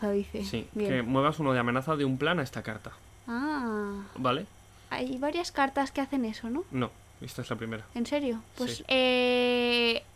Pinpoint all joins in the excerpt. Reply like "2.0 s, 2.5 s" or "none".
8.8 s